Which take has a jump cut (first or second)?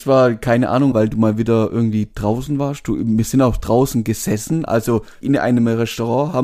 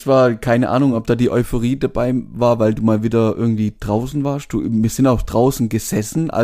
first